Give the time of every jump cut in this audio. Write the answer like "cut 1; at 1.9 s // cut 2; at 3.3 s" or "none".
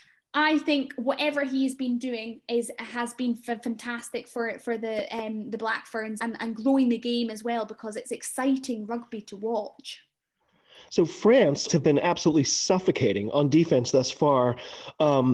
cut 1; at 6.2 s // cut 2; at 11.7 s